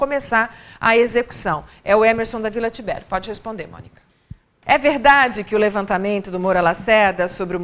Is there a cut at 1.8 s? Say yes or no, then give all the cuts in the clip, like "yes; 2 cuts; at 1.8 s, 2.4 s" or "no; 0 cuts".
no; 1 cut; at 4.6 s